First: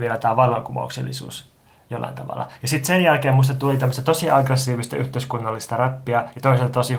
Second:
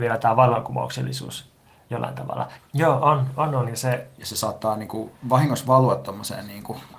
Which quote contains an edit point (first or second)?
second